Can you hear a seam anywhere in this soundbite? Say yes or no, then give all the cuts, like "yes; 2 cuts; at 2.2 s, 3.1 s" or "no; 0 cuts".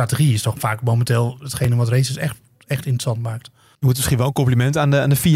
no; 0 cuts